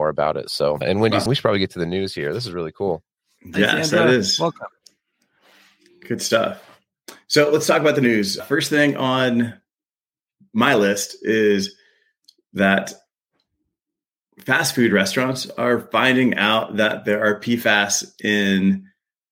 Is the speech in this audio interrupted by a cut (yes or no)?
yes